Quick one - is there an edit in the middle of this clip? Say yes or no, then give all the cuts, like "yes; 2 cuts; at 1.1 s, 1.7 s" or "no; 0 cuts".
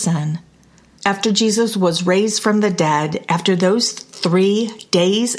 yes; 1 cut; at 1.0 s